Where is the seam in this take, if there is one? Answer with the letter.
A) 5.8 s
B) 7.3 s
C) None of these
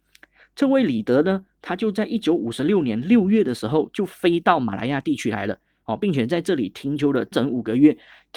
B